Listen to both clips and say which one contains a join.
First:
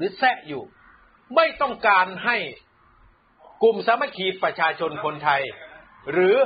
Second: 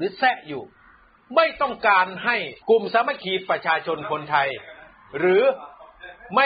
second; 1 cut; at 2.6 s

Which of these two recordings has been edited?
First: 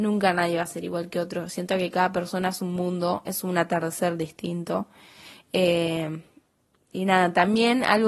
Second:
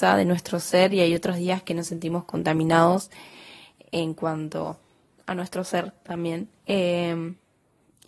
second; 1 cut; at 6.6 s

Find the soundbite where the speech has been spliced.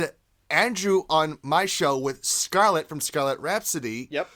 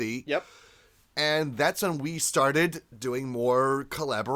second; 1 cut; at 1.0 s

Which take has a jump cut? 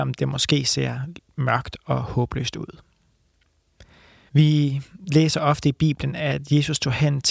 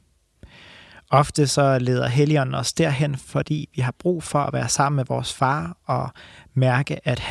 first; 1 cut; at 4.3 s

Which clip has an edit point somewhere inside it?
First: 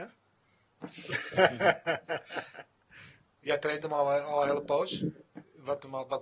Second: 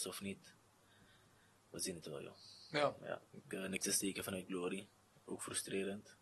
second; 1 cut; at 3.3 s

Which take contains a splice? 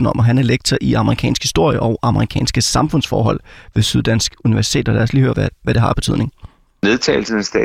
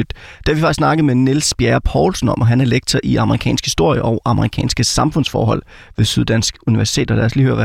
first; 1 cut; at 5.3 s

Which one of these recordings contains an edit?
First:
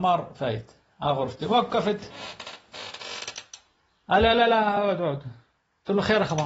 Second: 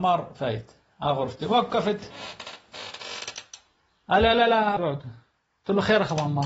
second; 1 cut; at 4.8 s

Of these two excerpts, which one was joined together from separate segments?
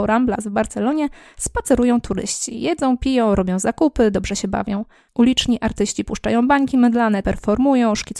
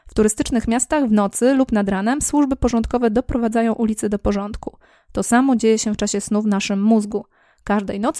first; 2 cuts; at 5.1 s, 7.2 s

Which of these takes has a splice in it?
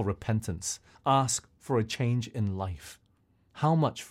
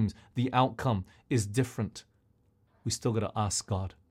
first; 1 cut; at 0.9 s

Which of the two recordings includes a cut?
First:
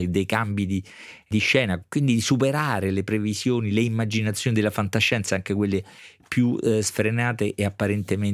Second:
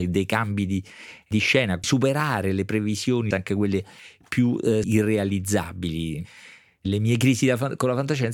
second; 3 cuts; at 1.8 s, 3.3 s, 4.8 s

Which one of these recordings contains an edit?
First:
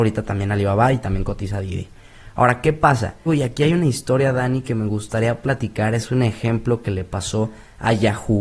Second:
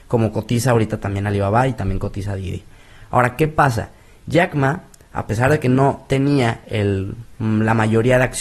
first; 1 cut; at 3.3 s

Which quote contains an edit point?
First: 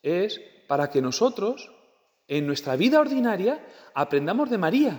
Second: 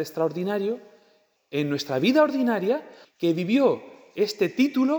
second; 2 cuts; at 1.4 s, 3.0 s

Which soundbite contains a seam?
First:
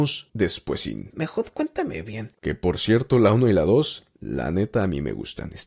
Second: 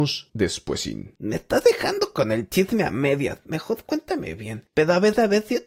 first; 2 cuts; at 1.1 s, 2.4 s

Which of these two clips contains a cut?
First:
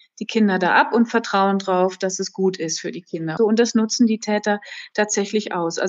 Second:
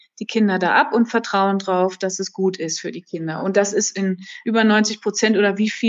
first; 1 cut; at 3.4 s

